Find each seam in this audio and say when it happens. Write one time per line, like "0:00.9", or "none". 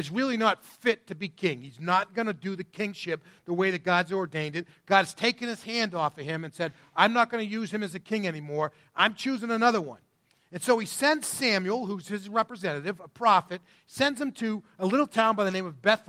none